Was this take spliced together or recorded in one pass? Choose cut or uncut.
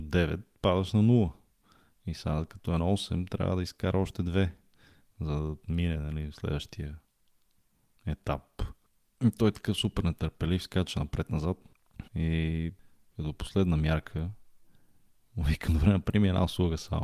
cut